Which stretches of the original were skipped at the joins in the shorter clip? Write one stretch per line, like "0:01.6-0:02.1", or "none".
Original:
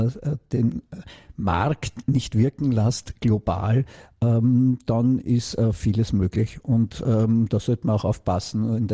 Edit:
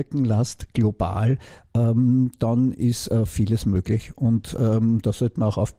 none

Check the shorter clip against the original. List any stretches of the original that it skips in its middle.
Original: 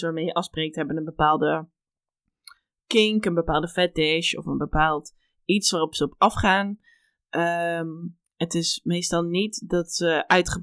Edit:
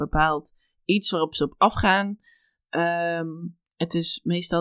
none

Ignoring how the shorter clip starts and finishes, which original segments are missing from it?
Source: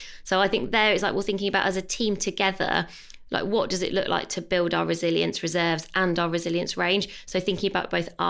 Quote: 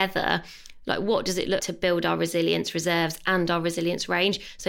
0:04.0-0:04.3

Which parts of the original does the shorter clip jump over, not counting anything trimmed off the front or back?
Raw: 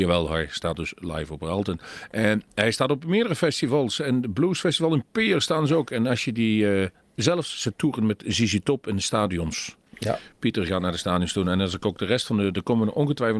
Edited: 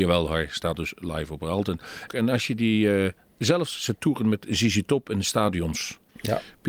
0:02.1-0:05.9

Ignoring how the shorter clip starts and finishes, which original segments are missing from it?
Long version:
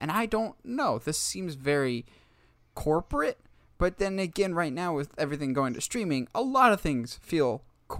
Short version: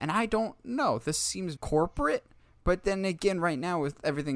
0:01.6-0:02.7

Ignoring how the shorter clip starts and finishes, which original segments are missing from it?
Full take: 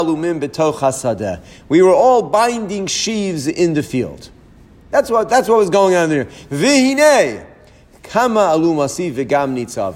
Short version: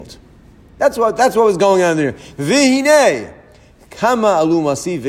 none

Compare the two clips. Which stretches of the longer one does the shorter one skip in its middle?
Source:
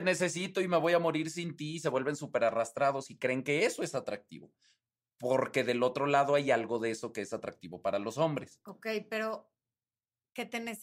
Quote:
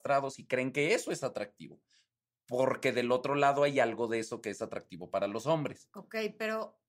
none

